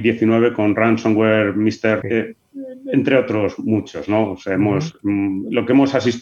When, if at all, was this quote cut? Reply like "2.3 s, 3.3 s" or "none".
2.0 s